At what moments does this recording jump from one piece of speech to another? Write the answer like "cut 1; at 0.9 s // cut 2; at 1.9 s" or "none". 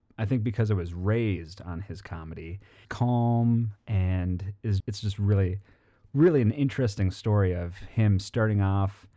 cut 1; at 2.8 s // cut 2; at 4.8 s